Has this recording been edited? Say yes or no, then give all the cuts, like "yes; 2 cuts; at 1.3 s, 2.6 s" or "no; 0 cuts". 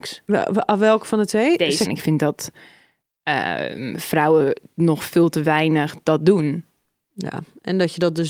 yes; 1 cut; at 1.9 s